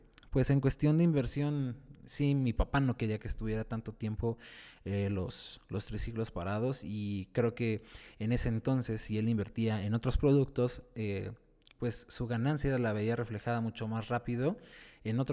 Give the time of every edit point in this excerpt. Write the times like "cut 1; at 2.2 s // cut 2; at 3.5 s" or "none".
none